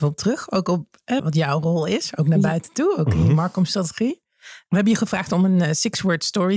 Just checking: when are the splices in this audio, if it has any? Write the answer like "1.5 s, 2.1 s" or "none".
1.2 s